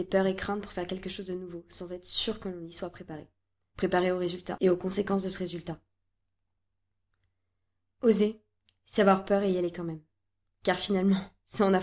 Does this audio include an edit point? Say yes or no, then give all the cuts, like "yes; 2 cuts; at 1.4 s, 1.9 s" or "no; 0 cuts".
no; 0 cuts